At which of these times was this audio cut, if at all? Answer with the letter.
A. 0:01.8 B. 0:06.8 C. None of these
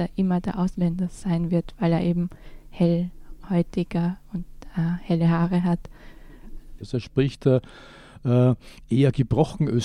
B